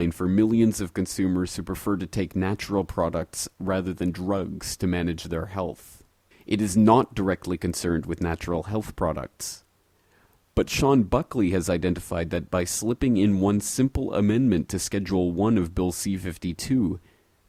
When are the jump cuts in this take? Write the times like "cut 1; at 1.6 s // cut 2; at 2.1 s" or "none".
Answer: cut 1; at 6.3 s